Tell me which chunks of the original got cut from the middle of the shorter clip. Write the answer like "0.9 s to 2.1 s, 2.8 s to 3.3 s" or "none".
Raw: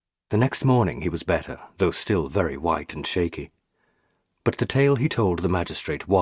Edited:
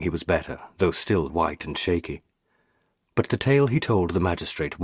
2.3 s to 2.6 s